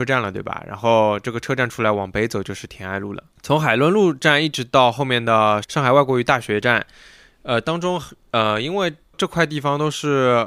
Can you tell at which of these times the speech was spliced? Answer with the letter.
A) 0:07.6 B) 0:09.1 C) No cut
B